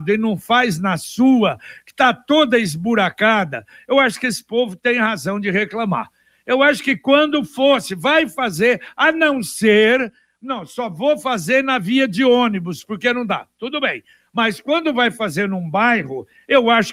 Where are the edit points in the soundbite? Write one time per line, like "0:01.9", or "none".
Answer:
none